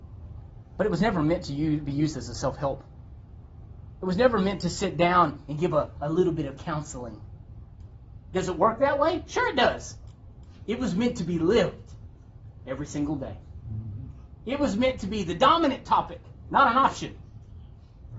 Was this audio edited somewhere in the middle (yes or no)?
no